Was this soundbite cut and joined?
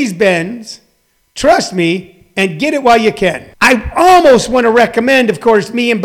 yes; 1 cut; at 3.5 s

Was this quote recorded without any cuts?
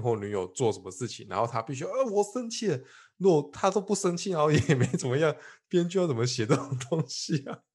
yes; 0 cuts

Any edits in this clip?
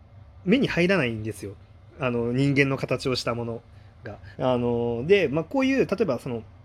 yes; 1 cut; at 4.4 s

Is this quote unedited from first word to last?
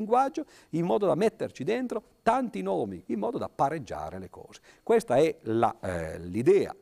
no; 1 cut; at 3.0 s

